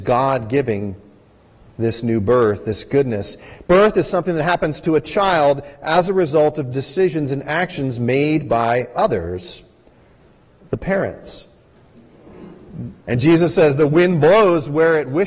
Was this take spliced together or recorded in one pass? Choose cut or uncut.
cut